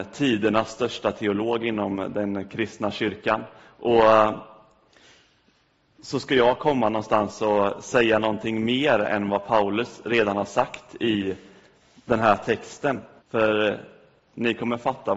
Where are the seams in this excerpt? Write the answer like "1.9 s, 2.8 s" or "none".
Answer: 13.2 s